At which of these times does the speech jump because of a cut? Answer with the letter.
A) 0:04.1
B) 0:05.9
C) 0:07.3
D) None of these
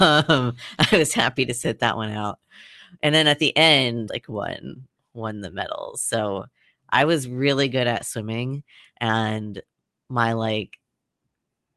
A